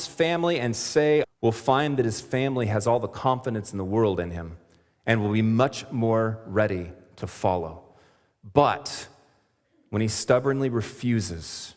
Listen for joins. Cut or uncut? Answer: cut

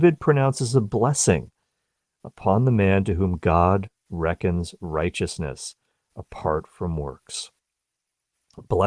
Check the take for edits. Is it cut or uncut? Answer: uncut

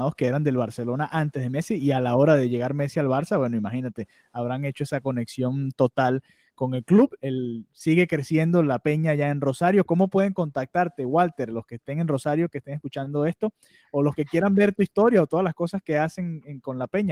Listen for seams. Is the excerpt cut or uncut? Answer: uncut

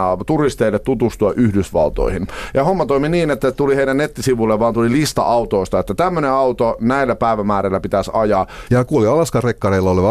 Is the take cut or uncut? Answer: cut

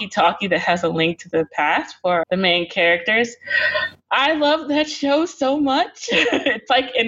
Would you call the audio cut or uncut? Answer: cut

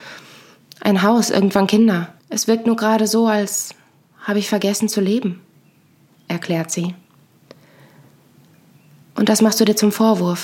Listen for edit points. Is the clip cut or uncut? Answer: cut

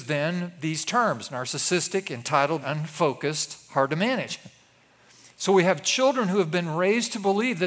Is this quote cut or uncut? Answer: cut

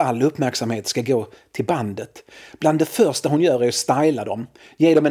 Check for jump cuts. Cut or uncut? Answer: uncut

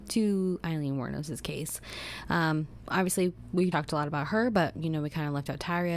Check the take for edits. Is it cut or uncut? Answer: cut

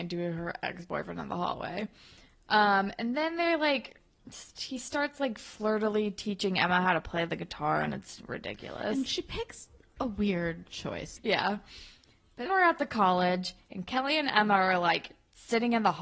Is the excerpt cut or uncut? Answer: cut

